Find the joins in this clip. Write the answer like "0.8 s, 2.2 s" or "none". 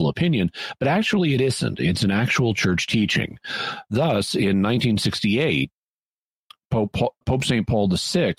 7.2 s